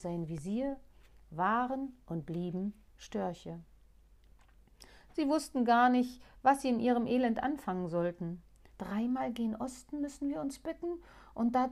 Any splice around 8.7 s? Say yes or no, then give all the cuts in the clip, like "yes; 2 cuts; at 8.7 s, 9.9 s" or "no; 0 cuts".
yes; 2 cuts; at 5.1 s, 8.7 s